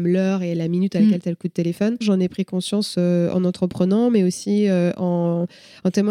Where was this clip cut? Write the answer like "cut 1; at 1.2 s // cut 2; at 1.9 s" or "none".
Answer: cut 1; at 2.0 s

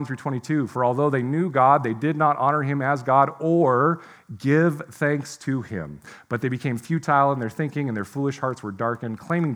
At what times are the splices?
none

